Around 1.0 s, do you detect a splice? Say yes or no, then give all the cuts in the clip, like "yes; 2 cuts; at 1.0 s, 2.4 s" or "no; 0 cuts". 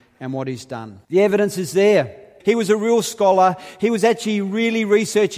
yes; 2 cuts; at 1.0 s, 2.4 s